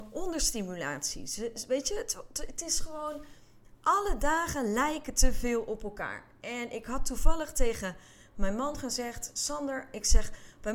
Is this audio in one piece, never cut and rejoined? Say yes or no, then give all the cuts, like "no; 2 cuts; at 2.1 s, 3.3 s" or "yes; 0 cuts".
yes; 0 cuts